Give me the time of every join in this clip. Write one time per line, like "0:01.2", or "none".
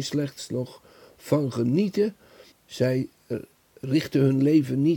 0:02.5